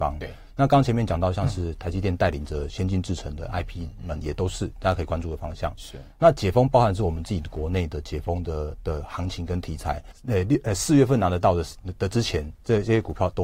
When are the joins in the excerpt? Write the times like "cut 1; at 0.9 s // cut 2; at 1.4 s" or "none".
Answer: cut 1; at 5.8 s // cut 2; at 10.1 s